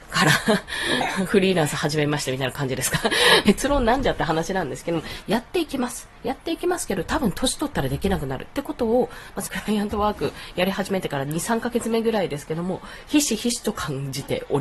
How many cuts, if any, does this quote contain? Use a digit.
3